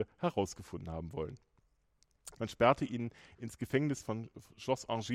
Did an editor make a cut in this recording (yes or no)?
yes